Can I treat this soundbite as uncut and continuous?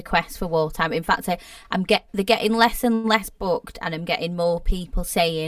yes; 0 cuts

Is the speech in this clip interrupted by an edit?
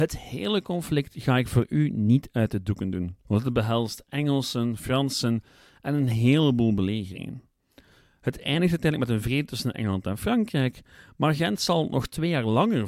no; 0 cuts

